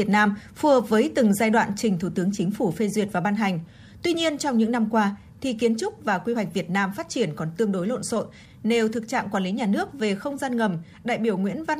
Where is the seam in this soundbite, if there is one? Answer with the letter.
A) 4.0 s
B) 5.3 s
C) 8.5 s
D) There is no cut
B